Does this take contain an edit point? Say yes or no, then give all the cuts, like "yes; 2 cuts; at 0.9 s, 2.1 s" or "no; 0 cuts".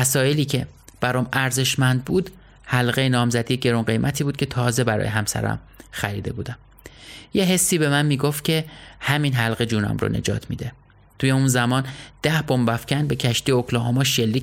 no; 0 cuts